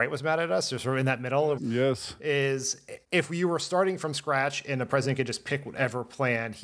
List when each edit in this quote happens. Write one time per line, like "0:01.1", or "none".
0:01.6
0:03.0